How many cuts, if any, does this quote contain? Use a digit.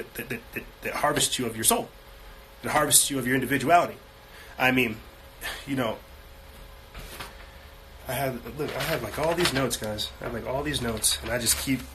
0